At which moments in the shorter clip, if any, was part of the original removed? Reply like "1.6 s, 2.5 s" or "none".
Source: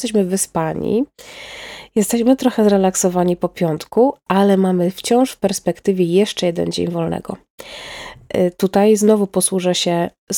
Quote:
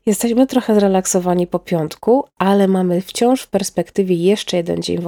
none